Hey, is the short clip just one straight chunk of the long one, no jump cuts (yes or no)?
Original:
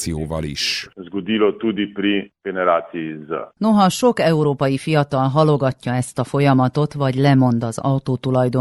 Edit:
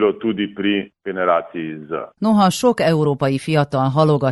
yes